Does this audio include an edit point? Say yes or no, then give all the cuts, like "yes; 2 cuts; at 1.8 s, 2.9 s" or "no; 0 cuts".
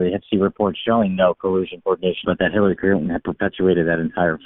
yes; 1 cut; at 2.2 s